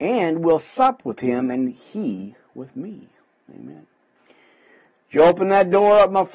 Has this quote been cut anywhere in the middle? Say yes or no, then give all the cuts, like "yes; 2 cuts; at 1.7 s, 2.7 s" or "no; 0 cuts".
no; 0 cuts